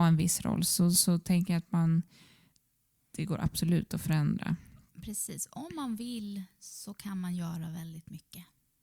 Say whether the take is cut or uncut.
uncut